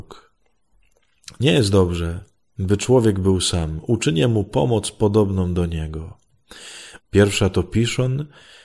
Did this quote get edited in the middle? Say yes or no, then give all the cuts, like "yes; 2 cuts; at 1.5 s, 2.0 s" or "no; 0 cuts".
yes; 1 cut; at 7.0 s